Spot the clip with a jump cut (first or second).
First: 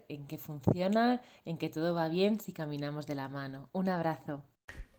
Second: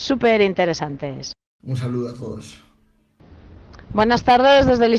second